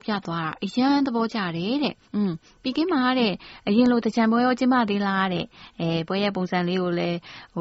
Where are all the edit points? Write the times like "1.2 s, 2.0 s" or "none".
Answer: 2.0 s